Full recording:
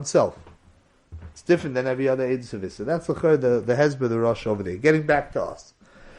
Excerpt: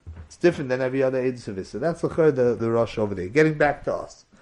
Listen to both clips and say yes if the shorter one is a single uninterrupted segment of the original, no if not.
no